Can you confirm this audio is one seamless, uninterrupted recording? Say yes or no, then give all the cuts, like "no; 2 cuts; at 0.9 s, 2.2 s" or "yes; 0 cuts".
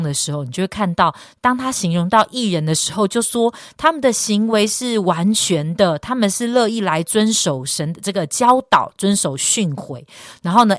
yes; 0 cuts